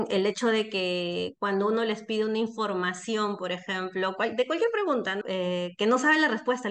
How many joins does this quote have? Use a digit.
1